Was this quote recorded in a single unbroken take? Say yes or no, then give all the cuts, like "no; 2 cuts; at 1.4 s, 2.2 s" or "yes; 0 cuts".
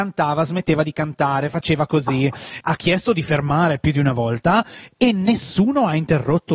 no; 1 cut; at 2.6 s